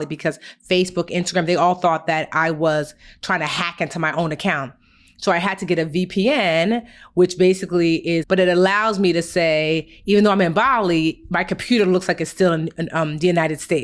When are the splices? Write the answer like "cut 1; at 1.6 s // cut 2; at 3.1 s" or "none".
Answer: cut 1; at 8.2 s